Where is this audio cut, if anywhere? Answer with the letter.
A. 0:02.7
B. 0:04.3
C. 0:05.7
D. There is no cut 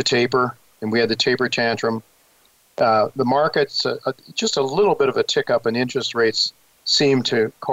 D